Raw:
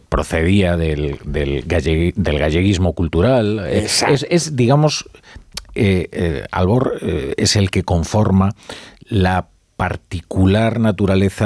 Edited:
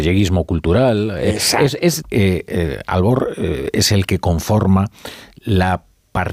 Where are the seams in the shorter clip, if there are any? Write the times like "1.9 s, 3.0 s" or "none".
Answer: 2.0 s